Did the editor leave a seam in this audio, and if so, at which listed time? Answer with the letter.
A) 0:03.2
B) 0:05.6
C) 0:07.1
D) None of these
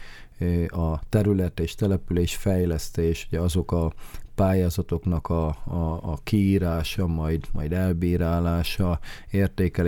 D